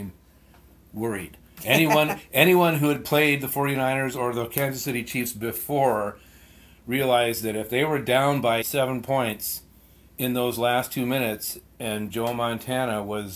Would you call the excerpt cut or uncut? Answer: cut